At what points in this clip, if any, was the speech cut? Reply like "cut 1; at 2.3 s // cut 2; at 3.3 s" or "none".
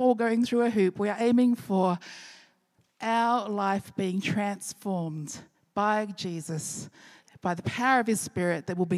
none